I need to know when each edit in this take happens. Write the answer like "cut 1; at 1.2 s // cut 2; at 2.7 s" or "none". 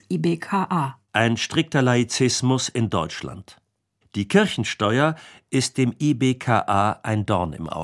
cut 1; at 1.1 s